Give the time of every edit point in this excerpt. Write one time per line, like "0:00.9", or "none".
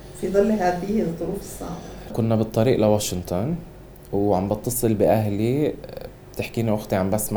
0:02.1